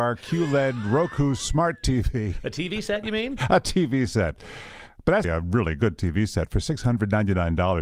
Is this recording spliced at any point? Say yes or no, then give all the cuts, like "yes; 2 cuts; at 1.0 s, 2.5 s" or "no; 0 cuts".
yes; 1 cut; at 5.2 s